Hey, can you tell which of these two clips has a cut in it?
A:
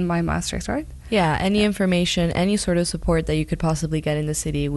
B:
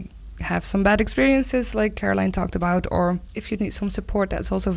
B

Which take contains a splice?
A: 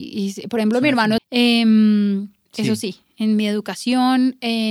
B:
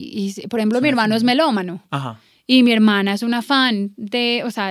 A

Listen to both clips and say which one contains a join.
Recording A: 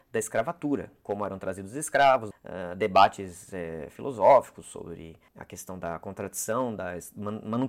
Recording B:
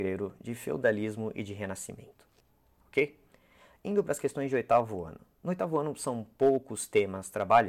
A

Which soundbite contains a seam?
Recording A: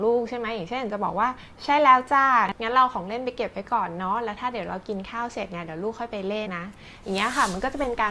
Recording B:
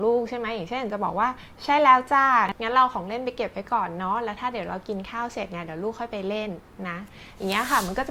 A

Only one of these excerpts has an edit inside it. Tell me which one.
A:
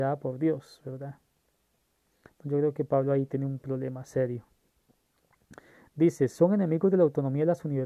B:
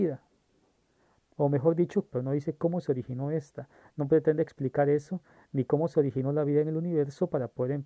B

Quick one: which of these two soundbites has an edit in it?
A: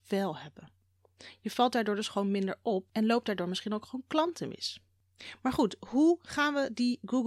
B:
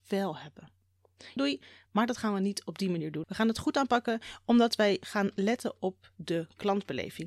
B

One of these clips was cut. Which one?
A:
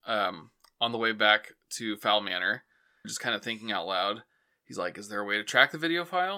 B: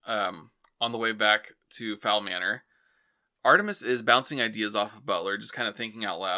A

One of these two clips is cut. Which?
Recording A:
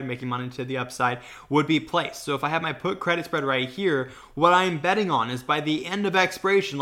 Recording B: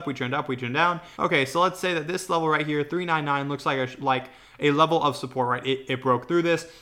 B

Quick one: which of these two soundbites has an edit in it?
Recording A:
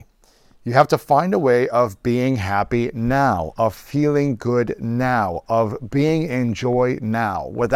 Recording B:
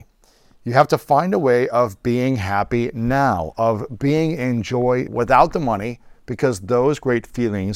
B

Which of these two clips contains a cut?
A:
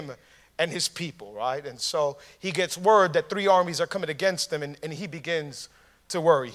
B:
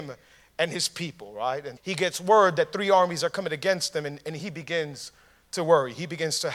B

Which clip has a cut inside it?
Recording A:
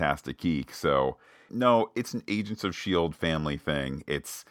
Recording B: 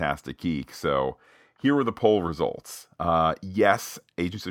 A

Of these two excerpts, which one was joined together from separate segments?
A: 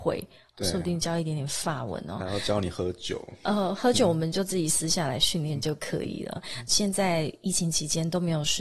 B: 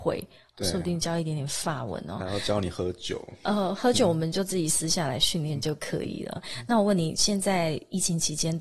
A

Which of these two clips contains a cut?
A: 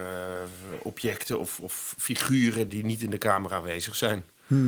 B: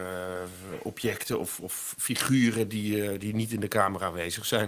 A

